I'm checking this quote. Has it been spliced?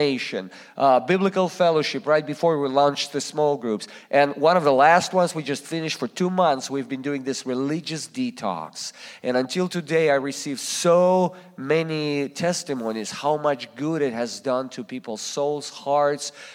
no; 0 cuts

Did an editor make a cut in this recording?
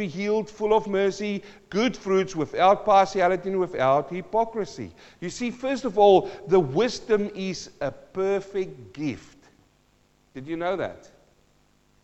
no; 0 cuts

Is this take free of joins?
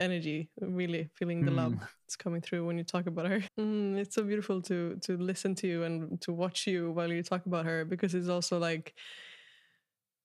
no; 1 cut; at 3.5 s

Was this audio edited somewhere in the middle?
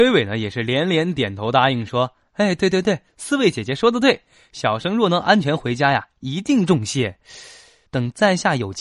yes; 1 cut; at 7.9 s

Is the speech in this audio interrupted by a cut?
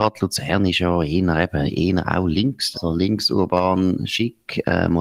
yes; 1 cut; at 2.7 s

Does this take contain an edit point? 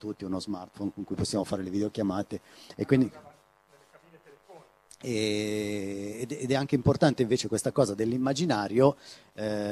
yes; 1 cut; at 4.9 s

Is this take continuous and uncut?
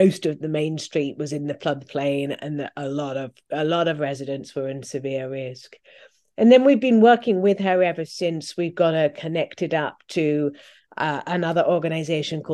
yes; 0 cuts

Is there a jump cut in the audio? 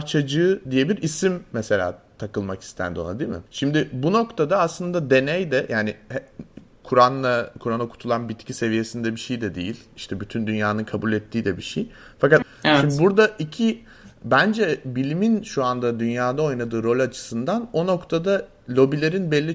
yes; 2 cuts; at 3.5 s, 12.4 s

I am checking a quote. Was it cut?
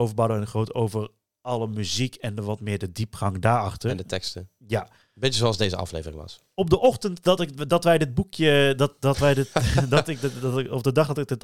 no; 0 cuts

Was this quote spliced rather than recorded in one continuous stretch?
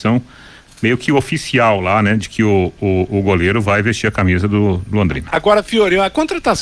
no; 0 cuts

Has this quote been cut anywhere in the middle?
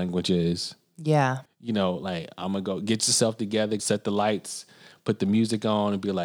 yes; 2 cuts; at 1.4 s, 3.8 s

